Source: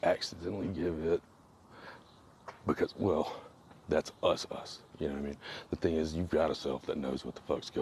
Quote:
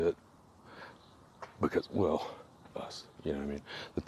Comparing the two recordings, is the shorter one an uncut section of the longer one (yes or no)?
no